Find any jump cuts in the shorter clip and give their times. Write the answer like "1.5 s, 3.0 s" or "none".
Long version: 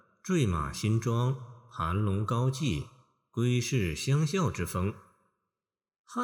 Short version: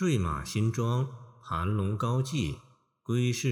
none